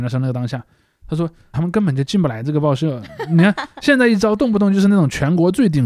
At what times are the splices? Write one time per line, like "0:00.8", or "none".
0:01.5